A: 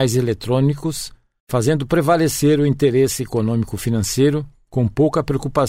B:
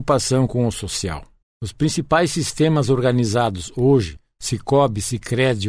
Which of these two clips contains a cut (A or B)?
B